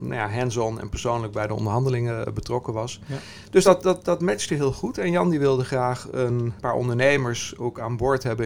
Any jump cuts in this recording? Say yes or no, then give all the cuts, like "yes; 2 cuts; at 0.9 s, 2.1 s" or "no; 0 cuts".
no; 0 cuts